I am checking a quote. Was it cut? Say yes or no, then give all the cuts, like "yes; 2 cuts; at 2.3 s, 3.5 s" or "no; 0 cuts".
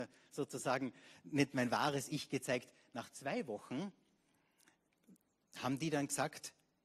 no; 0 cuts